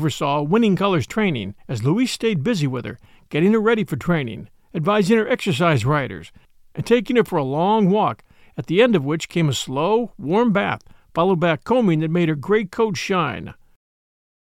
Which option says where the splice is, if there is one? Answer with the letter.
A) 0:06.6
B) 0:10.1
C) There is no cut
C